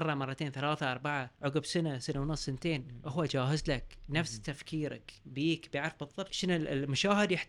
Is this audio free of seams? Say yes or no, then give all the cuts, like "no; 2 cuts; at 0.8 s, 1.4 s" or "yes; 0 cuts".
no; 2 cuts; at 1.3 s, 6.3 s